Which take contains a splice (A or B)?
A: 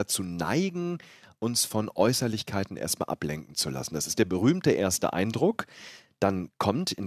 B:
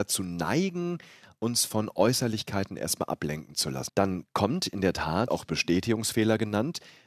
B